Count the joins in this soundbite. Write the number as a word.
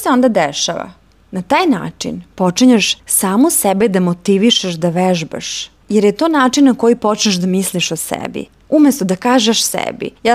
two